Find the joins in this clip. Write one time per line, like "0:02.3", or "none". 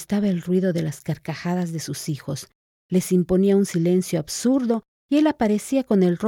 0:02.7